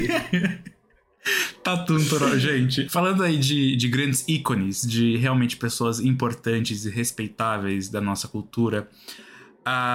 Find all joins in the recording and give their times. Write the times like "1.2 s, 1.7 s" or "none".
2.9 s